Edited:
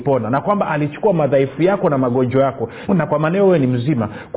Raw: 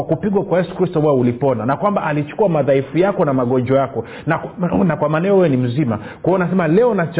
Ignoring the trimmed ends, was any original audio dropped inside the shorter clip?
yes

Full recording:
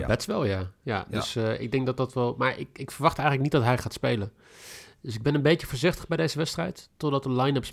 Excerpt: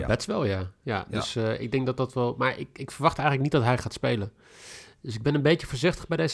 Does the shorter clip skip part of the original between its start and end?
no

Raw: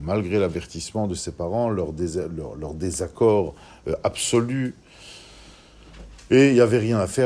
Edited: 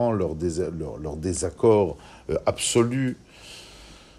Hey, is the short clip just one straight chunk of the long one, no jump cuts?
yes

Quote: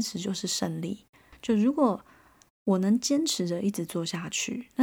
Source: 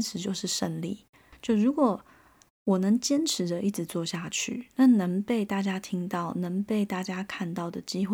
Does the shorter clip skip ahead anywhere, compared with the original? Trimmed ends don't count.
no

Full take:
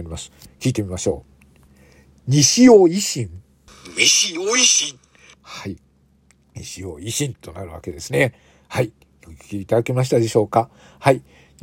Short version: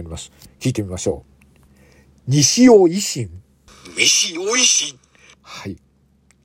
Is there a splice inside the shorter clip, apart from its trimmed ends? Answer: no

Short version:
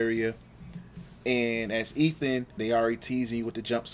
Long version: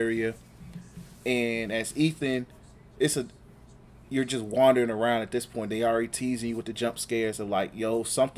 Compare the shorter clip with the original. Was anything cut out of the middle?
yes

